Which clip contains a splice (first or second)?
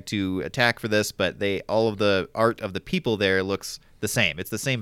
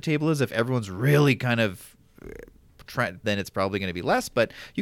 second